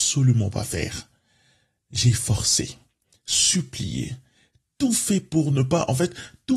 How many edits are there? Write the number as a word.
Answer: zero